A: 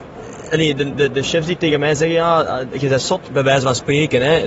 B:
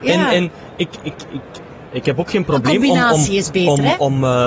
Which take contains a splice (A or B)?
B